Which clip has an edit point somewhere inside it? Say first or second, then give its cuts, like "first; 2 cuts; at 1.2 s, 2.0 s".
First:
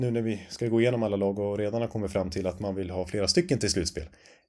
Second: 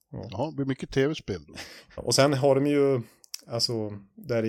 second; 1 cut; at 2.0 s